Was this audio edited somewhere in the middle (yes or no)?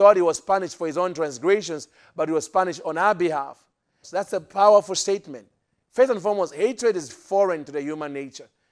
yes